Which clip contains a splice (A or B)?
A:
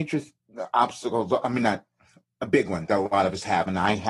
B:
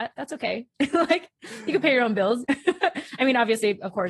B